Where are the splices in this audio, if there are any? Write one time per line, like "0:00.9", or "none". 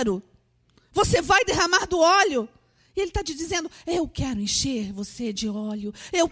none